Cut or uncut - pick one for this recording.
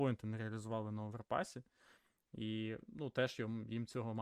uncut